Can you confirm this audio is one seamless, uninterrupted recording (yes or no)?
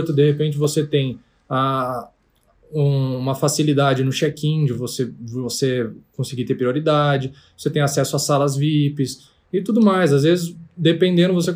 yes